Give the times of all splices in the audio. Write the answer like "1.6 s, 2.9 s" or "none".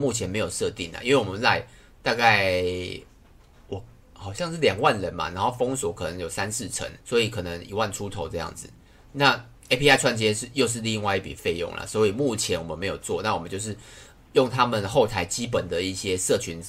7.0 s